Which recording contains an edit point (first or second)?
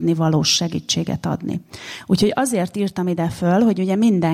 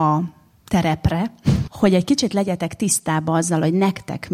second